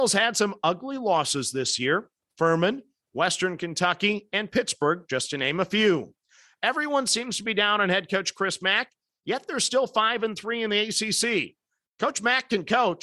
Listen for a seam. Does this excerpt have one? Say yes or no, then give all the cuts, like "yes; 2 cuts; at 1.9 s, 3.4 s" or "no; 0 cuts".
no; 0 cuts